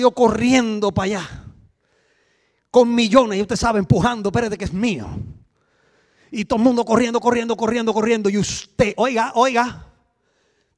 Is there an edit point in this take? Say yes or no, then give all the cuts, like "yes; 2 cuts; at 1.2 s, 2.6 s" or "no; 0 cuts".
no; 0 cuts